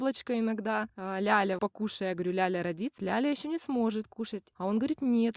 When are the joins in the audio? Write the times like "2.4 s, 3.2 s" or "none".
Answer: 1.6 s, 3.0 s